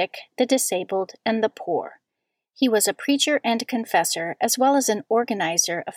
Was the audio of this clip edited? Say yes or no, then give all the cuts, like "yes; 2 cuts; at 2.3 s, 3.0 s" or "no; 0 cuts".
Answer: no; 0 cuts